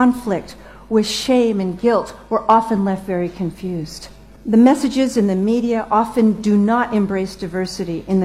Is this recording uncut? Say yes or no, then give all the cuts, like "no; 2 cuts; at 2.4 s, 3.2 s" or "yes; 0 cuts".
yes; 0 cuts